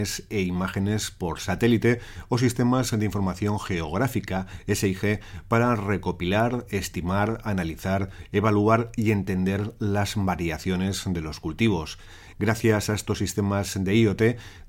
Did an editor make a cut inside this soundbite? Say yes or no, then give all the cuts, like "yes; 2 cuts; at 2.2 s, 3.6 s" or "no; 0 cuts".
yes; 1 cut; at 12.3 s